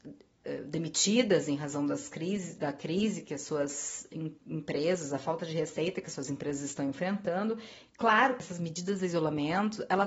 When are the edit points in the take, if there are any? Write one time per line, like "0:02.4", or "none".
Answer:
0:07.9